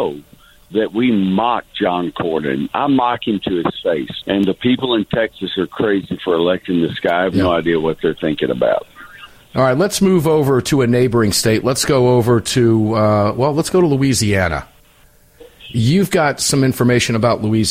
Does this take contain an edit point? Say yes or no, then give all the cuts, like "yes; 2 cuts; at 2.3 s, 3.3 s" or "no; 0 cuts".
yes; 1 cut; at 4.2 s